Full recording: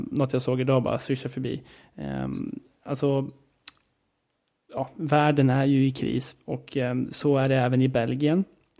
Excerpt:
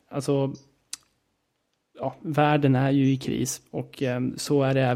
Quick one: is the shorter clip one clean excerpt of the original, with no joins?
yes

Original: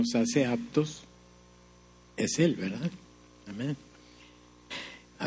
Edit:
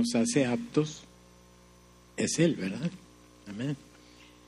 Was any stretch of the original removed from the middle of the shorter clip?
no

